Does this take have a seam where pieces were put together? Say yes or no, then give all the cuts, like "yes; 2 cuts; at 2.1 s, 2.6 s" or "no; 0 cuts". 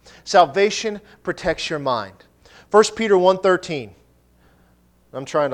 no; 0 cuts